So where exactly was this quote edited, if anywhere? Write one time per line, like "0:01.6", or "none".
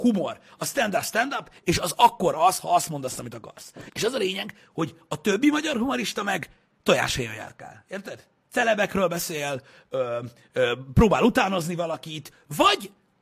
0:03.9